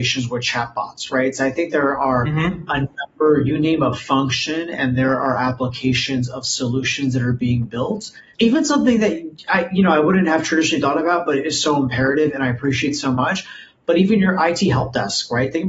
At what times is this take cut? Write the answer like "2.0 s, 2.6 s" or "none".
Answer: none